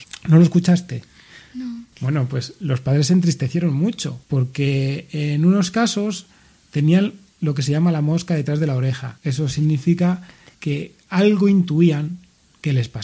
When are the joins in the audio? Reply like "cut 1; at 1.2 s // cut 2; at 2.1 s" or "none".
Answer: cut 1; at 1.9 s